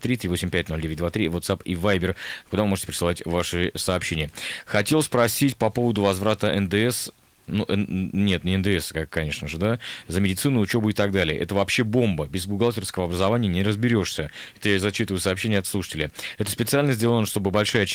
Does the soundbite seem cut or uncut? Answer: uncut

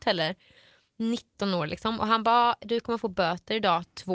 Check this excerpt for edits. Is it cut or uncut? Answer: uncut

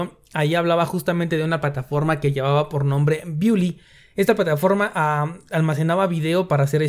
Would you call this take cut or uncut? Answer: uncut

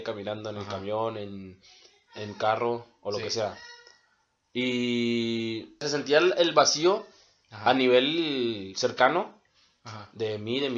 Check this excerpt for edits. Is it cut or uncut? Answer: uncut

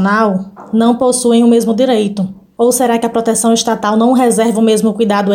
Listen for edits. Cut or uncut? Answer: uncut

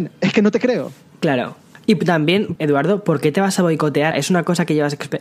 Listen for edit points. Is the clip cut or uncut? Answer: cut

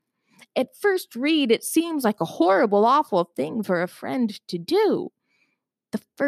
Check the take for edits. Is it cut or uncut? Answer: uncut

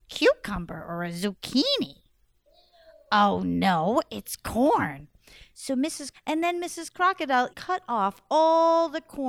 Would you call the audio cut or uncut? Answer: cut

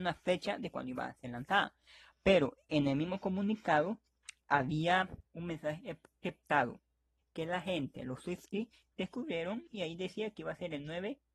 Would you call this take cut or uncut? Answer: cut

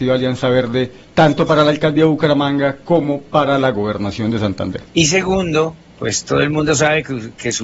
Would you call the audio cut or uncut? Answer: cut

